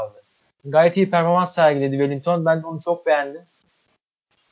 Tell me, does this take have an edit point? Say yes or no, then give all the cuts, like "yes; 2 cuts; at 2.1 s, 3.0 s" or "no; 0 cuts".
no; 0 cuts